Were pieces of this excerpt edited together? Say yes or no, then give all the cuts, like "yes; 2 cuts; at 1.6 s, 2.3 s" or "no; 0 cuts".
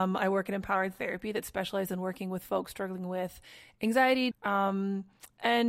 yes; 1 cut; at 4.3 s